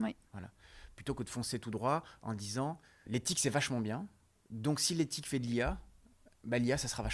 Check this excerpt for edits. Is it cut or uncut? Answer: cut